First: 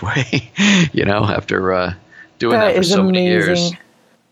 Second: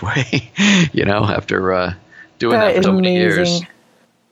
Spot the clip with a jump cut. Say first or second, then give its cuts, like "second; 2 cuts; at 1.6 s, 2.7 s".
second; 1 cut; at 2.8 s